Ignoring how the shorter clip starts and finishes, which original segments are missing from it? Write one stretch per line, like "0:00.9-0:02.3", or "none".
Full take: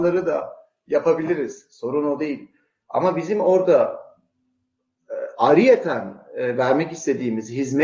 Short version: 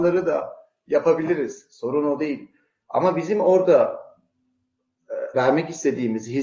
0:05.3-0:06.6